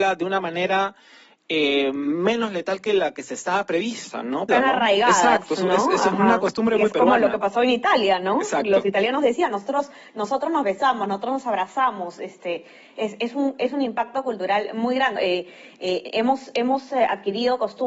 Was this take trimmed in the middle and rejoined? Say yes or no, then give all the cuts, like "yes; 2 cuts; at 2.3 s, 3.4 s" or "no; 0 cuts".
yes; 2 cuts; at 4.5 s, 15.2 s